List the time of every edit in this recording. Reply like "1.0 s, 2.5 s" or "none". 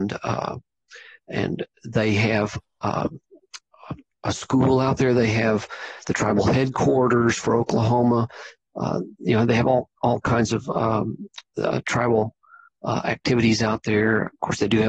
none